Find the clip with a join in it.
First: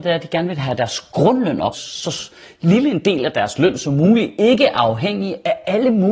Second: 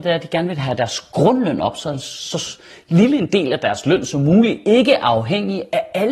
first; 1 cut; at 1.7 s

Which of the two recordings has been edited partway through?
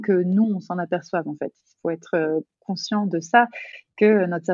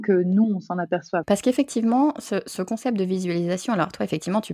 second; 1 cut; at 1.2 s

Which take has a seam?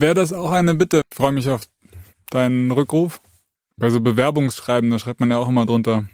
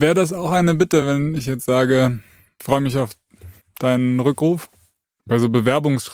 first; 1 cut; at 1.0 s

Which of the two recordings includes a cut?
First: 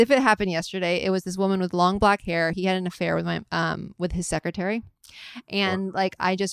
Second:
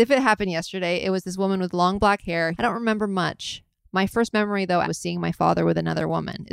second; 2 cuts; at 2.5 s, 4.8 s

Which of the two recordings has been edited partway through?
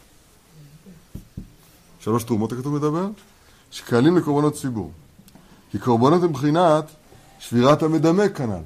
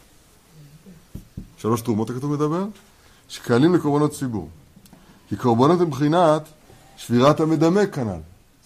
second; 1 cut; at 1.5 s

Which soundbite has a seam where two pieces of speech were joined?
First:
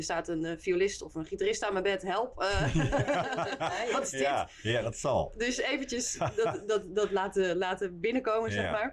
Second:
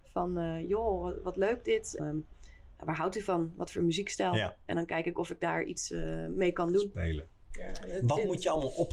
second; 2 cuts; at 2.0 s, 7.5 s

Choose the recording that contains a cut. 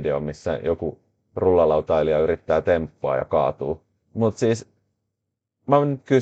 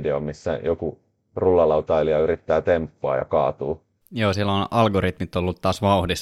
second; 1 cut; at 4.0 s

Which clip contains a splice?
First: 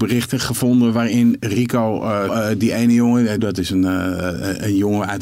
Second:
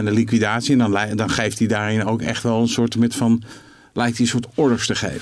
first; 2 cuts; at 2.3 s, 3.4 s

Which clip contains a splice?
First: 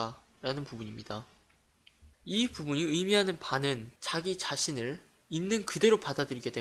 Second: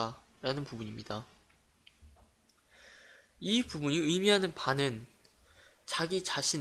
first; 2 cuts; at 2.1 s, 4.0 s

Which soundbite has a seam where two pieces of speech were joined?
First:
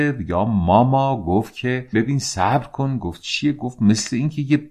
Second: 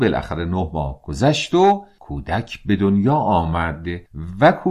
first; 1 cut; at 1.9 s

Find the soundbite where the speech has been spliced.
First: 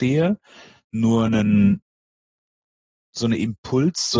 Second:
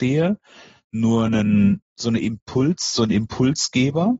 second; 1 cut; at 1.9 s

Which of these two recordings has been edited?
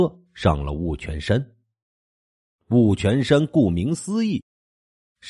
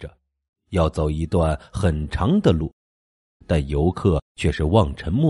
second; 1 cut; at 3.4 s

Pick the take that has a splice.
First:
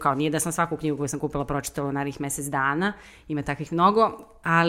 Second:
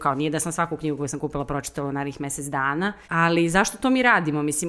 second; 1 cut; at 3.0 s

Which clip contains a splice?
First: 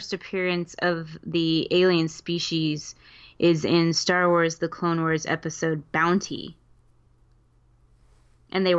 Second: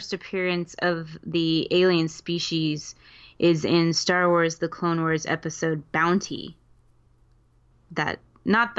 second; 1 cut; at 7.7 s

